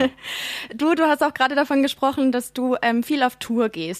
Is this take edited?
no; 0 cuts

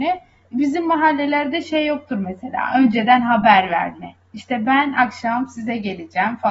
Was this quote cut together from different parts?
no; 0 cuts

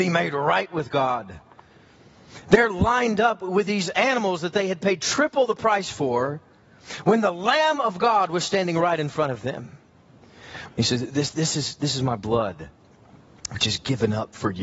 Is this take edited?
yes; 1 cut; at 10.7 s

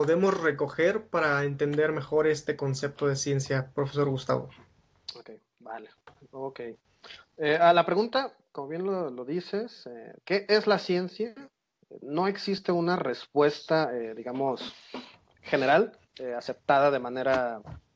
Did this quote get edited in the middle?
no; 0 cuts

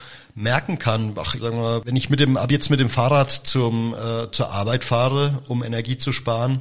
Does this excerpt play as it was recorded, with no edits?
no; 1 cut; at 1.4 s

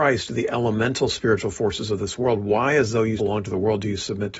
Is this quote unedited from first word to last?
no; 1 cut; at 3.2 s

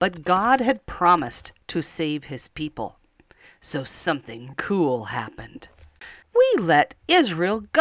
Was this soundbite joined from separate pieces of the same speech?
yes; 2 cuts; at 4.5 s, 6.2 s

